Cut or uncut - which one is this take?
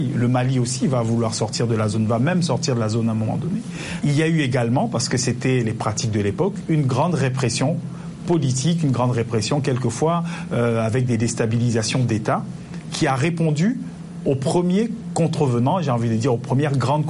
cut